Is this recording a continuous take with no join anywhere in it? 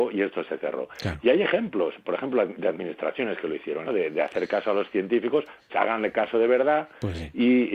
no; 2 cuts; at 3.9 s, 5.7 s

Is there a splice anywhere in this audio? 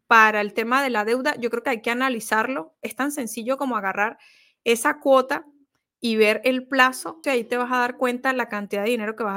yes; 1 cut; at 7.2 s

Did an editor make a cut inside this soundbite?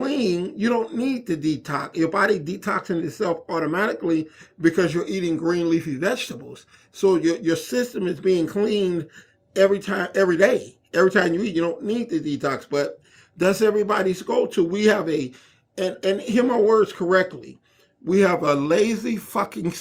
no; 0 cuts

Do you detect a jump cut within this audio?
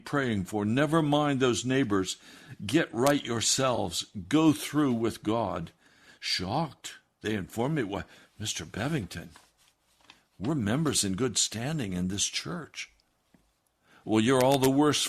no; 0 cuts

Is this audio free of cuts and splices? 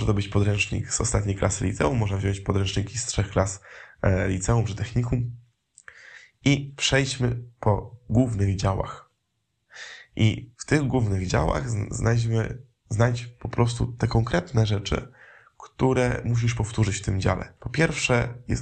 no; 1 cut; at 17.6 s

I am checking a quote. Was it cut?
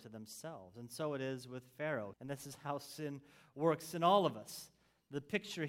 yes; 1 cut; at 2.1 s

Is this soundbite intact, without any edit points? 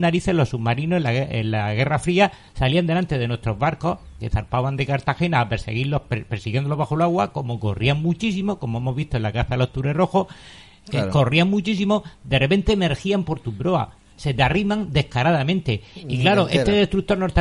yes; 0 cuts

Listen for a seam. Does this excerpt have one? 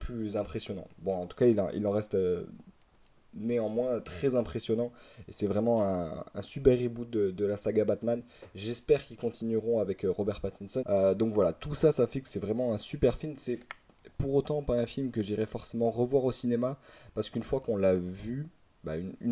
yes; 1 cut; at 10.8 s

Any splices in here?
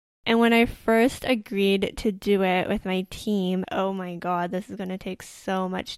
yes; 1 cut; at 3.6 s

